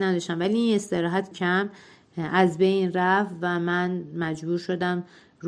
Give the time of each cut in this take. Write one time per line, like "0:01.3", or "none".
0:01.3